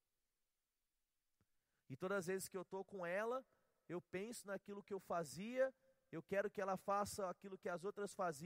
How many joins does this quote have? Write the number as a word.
zero